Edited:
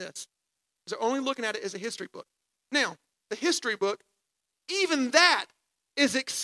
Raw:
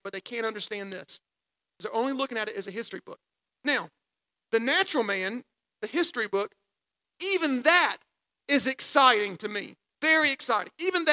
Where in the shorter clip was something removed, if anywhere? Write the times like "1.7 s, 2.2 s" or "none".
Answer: 3.1 s